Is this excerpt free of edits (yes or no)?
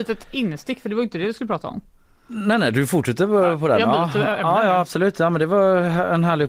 yes